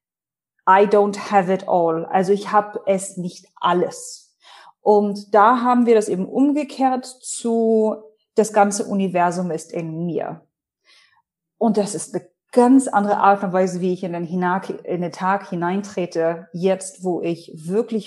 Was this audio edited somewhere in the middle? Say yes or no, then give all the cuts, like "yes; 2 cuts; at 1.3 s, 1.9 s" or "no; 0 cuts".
no; 0 cuts